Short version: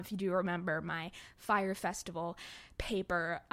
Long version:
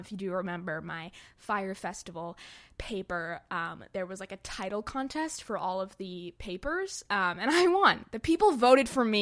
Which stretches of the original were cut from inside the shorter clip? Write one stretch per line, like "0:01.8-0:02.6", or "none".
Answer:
none

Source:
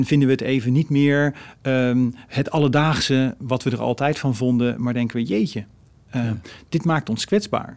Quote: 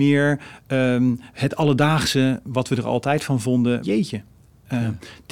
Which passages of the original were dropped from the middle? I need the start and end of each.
0:04.8-0:05.2

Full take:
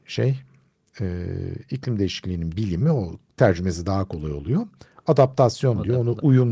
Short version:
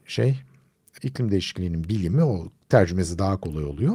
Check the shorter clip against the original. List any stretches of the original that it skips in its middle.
0:01.0-0:01.6

